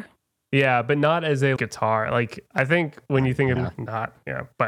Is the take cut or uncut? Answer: cut